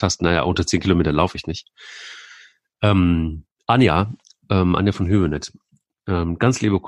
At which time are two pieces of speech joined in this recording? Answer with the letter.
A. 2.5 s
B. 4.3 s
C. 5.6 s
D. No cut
D